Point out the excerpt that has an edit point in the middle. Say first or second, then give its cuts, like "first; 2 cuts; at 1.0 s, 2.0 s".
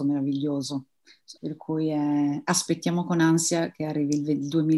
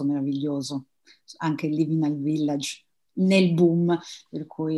first; 1 cut; at 1.4 s